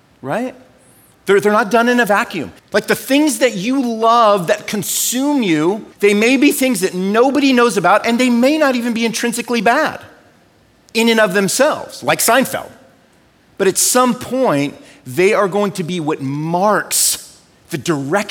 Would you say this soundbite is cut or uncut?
cut